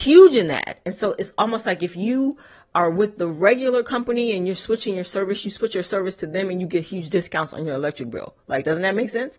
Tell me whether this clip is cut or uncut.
uncut